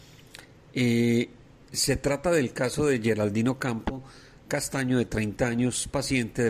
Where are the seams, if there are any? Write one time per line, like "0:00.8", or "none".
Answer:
none